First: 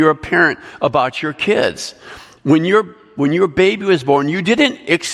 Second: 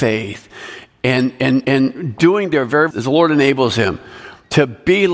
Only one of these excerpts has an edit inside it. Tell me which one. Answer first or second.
second